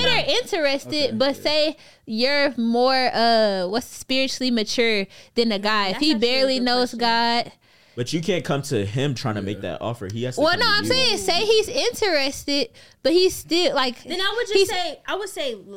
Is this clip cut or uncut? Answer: uncut